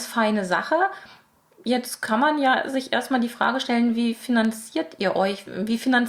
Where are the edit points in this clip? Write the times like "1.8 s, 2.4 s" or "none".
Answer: none